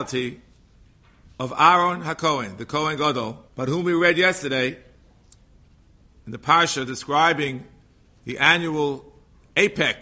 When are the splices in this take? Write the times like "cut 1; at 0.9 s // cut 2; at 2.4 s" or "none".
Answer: cut 1; at 3.5 s